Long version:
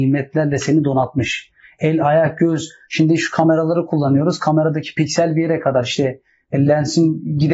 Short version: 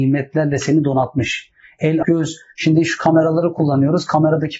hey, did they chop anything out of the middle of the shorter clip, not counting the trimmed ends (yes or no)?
yes